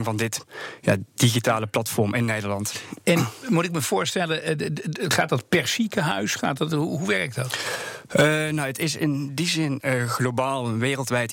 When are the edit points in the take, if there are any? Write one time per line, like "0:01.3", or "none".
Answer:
0:09.8